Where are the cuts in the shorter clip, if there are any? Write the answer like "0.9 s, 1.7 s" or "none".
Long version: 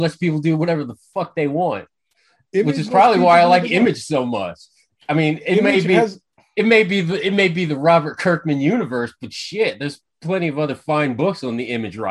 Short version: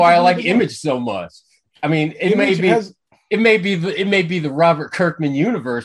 none